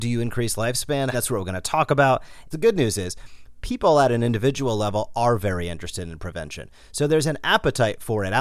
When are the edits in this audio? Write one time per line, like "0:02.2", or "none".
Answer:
0:01.1
0:02.5